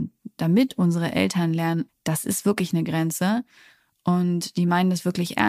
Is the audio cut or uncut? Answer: cut